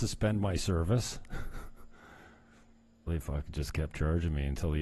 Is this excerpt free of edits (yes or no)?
no